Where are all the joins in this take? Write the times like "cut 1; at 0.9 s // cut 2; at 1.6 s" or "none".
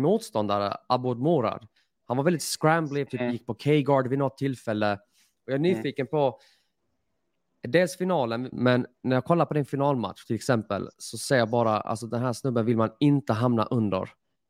cut 1; at 3.1 s // cut 2; at 8.5 s